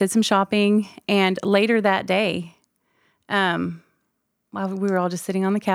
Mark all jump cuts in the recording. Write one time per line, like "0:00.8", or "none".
none